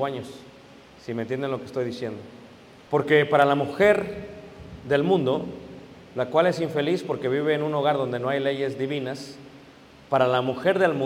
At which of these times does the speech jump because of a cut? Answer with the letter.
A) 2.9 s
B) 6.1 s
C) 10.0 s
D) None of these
A